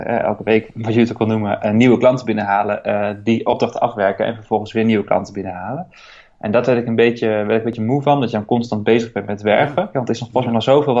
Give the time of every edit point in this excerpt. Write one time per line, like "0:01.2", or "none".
0:09.9